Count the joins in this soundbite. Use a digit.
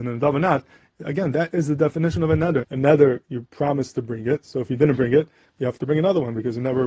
1